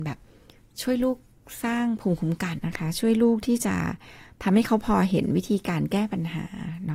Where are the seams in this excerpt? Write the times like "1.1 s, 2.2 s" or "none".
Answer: 2.6 s